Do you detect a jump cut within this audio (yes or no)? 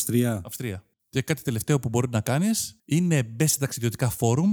yes